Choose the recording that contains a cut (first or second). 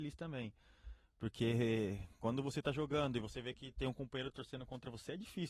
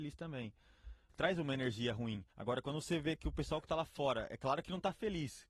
second